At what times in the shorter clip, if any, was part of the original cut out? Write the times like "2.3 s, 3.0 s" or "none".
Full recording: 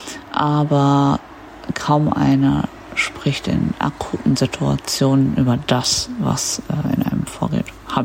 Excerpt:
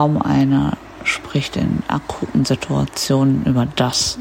none